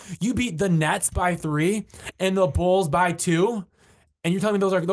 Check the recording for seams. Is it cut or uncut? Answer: uncut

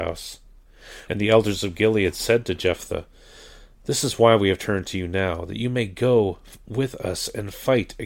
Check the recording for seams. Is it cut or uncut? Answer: cut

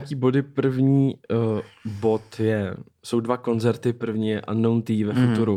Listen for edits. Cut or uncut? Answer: uncut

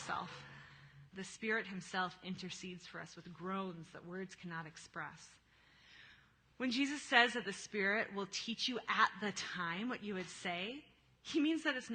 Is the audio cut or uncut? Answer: cut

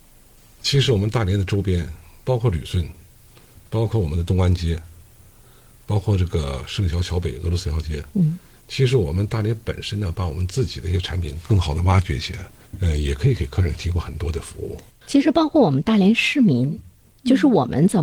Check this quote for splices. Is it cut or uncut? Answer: uncut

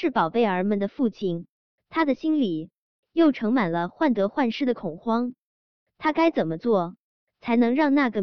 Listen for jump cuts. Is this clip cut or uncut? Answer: uncut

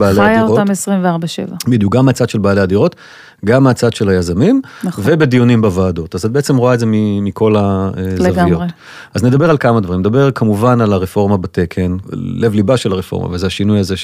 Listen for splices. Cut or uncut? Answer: cut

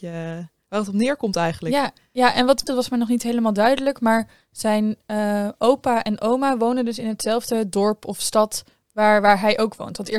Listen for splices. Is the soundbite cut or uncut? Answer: cut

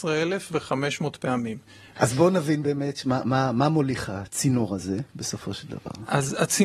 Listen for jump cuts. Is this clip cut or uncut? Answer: cut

